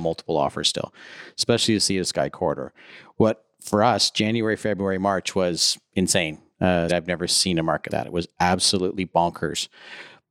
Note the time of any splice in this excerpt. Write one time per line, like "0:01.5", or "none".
0:06.9
0:07.9